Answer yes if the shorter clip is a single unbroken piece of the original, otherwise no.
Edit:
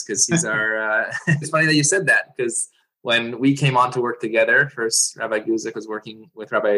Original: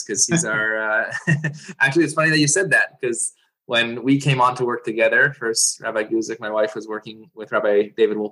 no